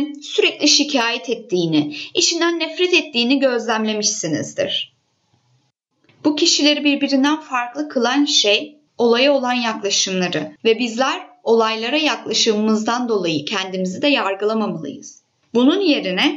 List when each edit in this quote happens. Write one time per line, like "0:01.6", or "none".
0:08.9
0:10.6